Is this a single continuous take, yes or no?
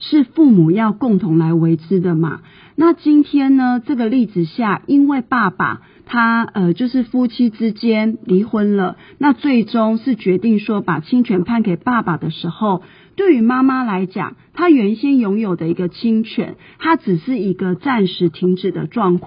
yes